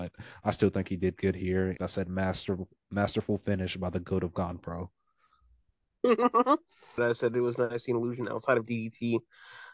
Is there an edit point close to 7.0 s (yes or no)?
yes